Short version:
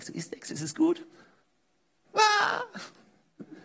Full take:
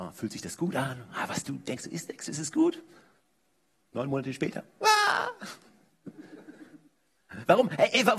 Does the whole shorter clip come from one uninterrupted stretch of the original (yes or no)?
no